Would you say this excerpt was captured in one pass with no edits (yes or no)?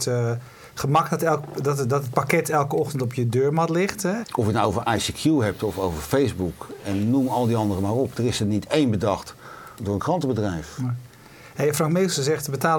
no